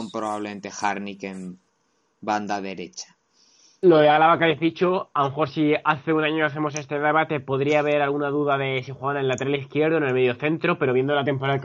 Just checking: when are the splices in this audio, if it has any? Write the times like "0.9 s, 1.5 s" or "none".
none